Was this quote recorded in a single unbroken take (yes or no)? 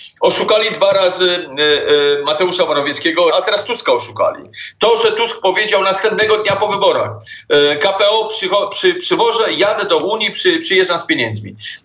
no